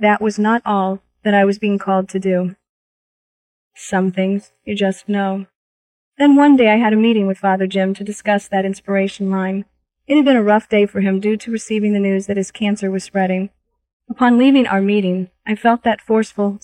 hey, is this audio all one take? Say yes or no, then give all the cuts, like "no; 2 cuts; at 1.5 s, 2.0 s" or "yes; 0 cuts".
yes; 0 cuts